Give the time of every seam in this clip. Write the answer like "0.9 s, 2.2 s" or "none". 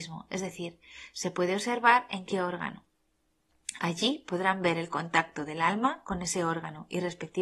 none